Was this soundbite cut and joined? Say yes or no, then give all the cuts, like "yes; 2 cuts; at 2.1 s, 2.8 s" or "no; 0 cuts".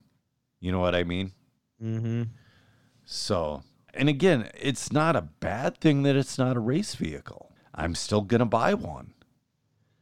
yes; 2 cuts; at 3.9 s, 7.6 s